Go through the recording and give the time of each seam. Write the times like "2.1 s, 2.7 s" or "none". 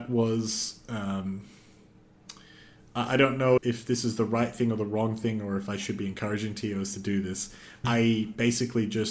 3.6 s, 7.8 s

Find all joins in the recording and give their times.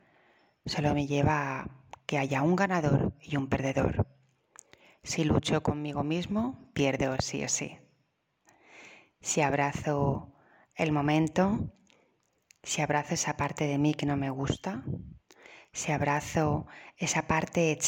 none

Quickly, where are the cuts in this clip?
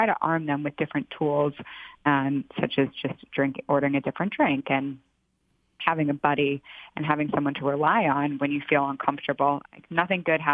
9.6 s

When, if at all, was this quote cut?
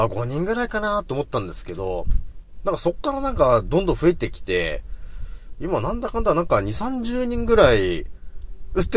none

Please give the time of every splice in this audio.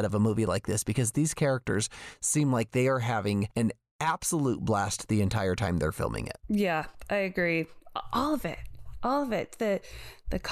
none

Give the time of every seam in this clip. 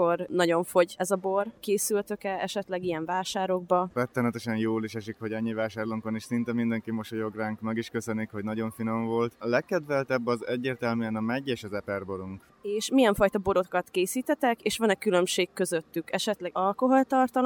3.9 s

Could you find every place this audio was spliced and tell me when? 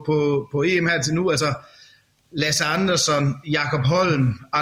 none

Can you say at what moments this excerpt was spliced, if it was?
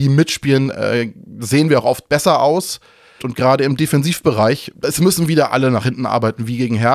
3.2 s, 4.7 s

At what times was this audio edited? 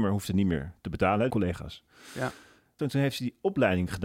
1.3 s, 2.8 s

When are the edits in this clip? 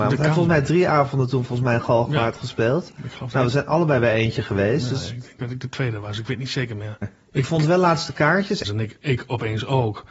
7.0 s, 8.6 s

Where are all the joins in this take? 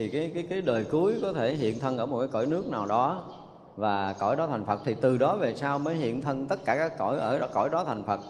none

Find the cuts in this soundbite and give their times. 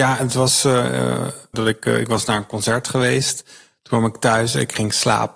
1.5 s

